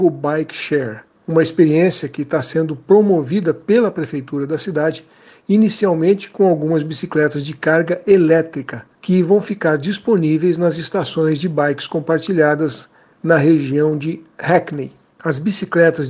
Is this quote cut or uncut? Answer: uncut